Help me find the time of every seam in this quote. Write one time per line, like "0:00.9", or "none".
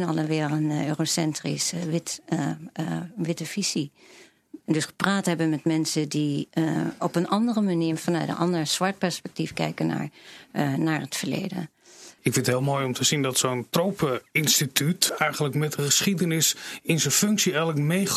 0:04.6
0:12.2
0:15.1